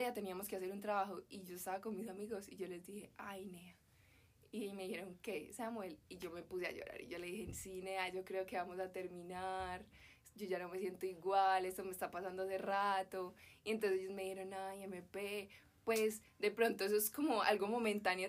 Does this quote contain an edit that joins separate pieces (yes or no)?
no